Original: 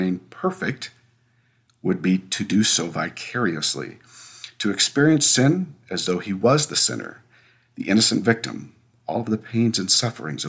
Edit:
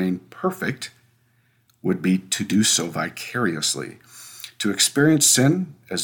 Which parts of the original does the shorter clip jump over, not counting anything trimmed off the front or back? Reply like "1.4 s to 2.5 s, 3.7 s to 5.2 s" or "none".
none